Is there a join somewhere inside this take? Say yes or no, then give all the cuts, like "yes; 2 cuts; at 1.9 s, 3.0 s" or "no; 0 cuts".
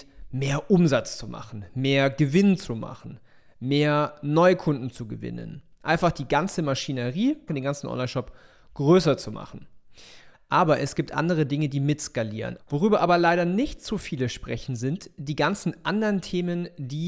yes; 3 cuts; at 7.5 s, 10.3 s, 12.6 s